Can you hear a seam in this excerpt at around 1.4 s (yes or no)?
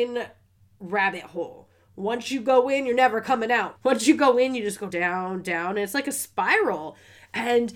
no